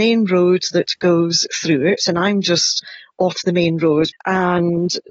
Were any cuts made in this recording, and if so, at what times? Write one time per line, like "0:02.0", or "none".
0:04.1